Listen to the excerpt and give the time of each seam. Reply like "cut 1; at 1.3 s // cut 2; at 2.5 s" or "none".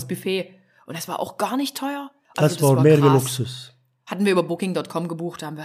cut 1; at 2.3 s